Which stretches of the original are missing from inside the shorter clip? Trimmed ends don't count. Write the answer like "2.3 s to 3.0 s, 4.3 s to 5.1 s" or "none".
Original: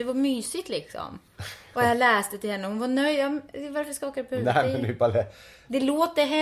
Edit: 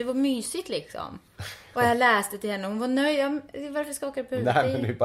none